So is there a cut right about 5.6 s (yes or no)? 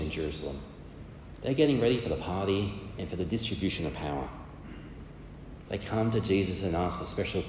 yes